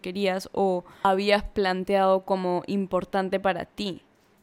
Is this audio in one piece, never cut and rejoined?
yes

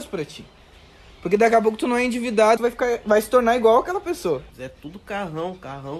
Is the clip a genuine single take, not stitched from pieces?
no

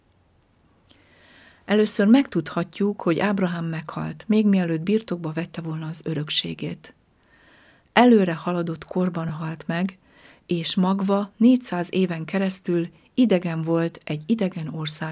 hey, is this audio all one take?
yes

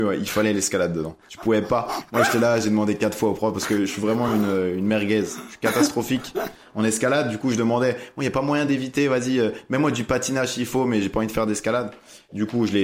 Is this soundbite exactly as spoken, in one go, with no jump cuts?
yes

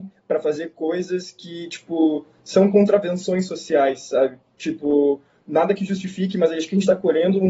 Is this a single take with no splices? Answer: yes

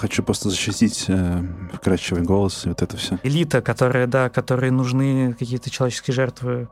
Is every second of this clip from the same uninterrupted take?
no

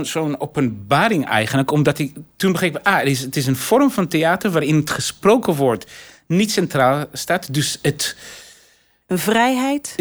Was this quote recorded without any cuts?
yes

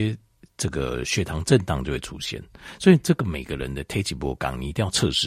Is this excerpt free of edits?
yes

